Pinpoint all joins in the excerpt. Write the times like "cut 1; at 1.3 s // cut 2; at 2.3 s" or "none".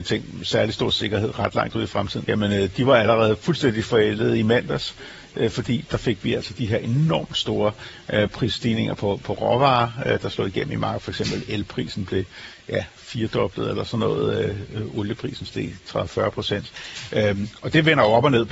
cut 1; at 2.2 s